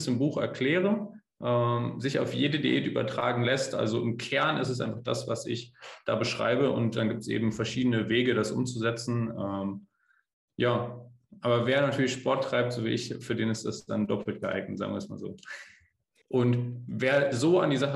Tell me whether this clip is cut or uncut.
cut